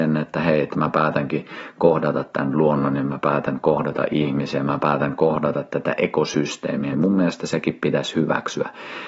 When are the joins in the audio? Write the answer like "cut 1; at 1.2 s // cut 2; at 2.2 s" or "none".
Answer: cut 1; at 6.9 s